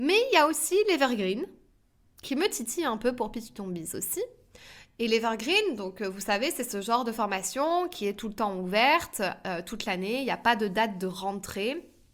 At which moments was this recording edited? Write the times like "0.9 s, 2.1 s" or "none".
none